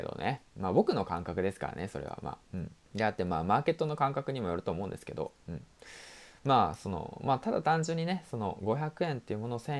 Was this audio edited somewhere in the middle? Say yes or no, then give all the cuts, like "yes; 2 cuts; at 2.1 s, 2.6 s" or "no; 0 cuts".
yes; 1 cut; at 2.8 s